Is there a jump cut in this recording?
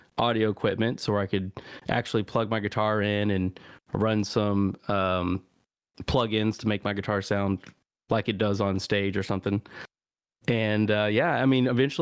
no; 0 cuts

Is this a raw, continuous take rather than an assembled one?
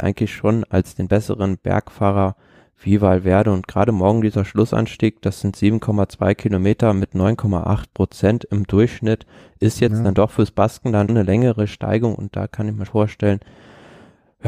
no; 2 cuts; at 11.1 s, 12.9 s

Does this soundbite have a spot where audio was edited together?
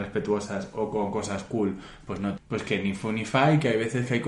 yes; 1 cut; at 2.4 s

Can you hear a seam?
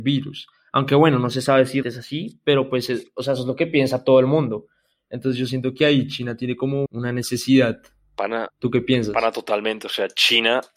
yes; 2 cuts; at 1.8 s, 6.9 s

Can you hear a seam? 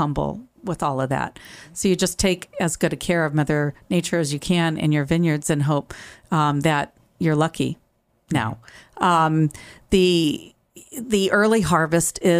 no; 0 cuts

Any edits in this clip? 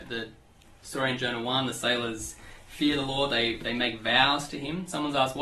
no; 0 cuts

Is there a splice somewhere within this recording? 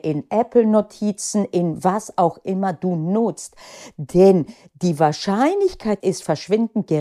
yes; 1 cut; at 6.0 s

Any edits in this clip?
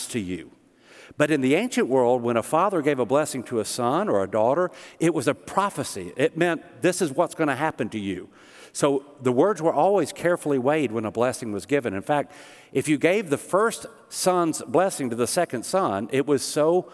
no; 0 cuts

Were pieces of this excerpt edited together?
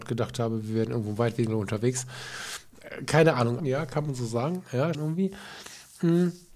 yes; 2 cuts; at 3.6 s, 4.9 s

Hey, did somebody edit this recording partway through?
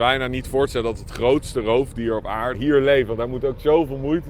yes; 1 cut; at 2.5 s

